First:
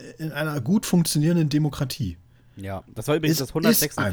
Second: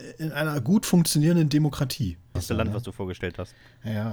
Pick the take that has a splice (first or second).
second